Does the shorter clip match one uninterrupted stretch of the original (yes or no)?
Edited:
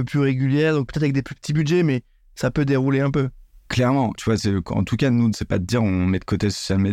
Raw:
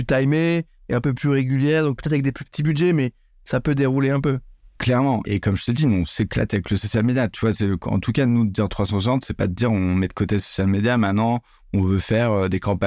no